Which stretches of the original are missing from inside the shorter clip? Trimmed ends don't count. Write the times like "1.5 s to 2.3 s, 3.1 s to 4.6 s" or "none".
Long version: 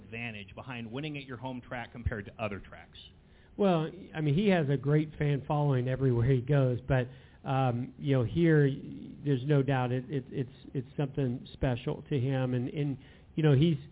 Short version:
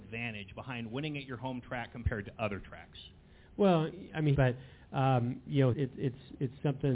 4.3 s to 6.9 s, 8.2 s to 10.1 s